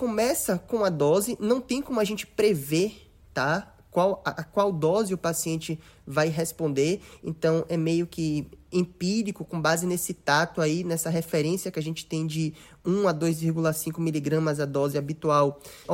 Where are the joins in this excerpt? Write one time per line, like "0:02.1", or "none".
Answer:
none

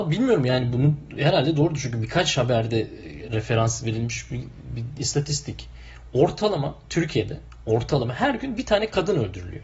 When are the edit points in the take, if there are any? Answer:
none

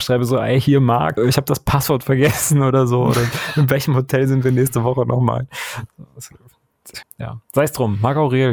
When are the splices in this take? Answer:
0:01.2
0:07.0

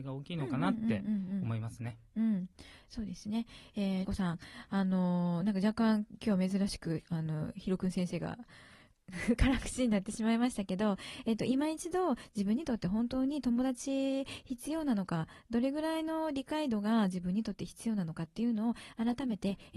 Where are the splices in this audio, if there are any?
0:04.0

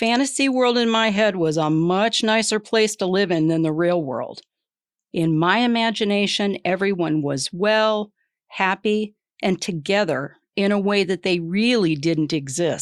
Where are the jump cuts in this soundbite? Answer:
none

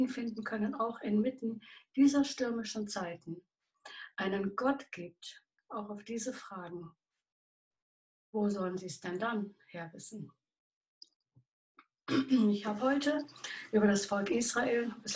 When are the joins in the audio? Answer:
0:05.6

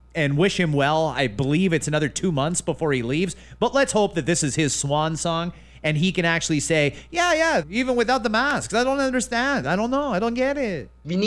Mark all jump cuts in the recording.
0:07.6
0:09.6

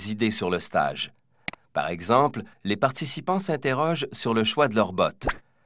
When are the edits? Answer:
0:02.5

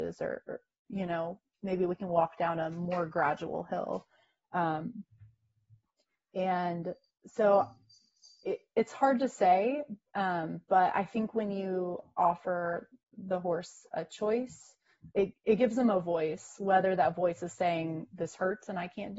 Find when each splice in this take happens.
0:15.1

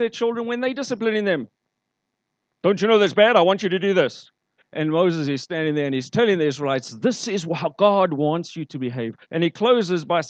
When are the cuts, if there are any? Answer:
0:04.6
0:09.2

